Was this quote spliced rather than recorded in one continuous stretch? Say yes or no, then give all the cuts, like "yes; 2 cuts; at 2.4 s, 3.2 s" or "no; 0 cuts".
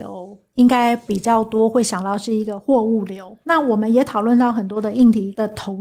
yes; 1 cut; at 3.4 s